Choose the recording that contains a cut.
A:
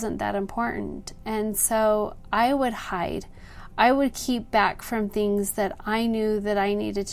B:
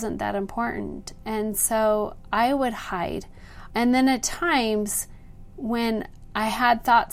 B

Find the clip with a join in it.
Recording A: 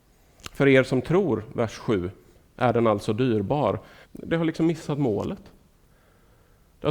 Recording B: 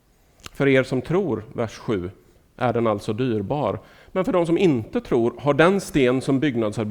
A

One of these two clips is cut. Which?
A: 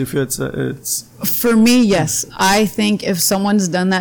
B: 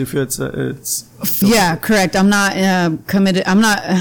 B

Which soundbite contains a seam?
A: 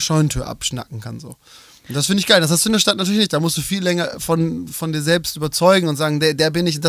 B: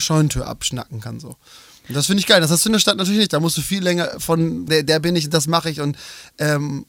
B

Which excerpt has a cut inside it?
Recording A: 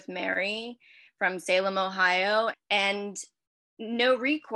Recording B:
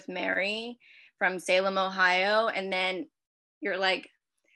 A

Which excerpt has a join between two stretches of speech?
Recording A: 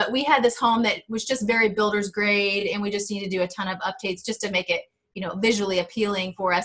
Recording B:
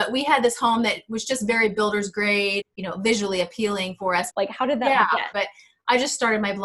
B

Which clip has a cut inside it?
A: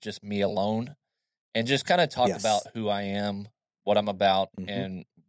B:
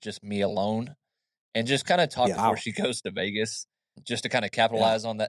B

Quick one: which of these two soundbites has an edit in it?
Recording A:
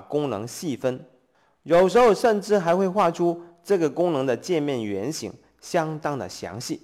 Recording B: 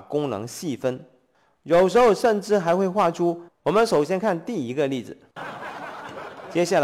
B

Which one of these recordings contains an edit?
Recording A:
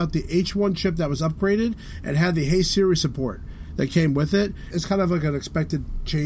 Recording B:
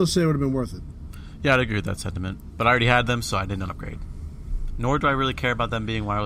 A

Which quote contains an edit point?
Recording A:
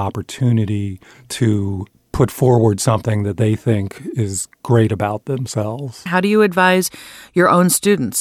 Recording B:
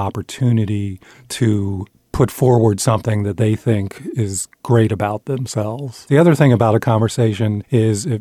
A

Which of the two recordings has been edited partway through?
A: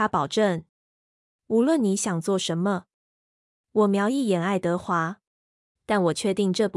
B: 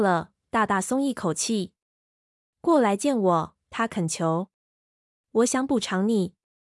A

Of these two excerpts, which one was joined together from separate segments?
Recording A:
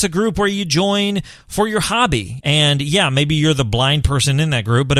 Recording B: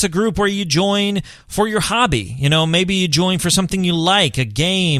A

